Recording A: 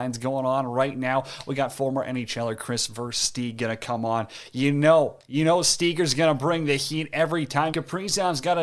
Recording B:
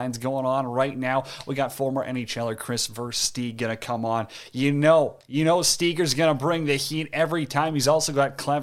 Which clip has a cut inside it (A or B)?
A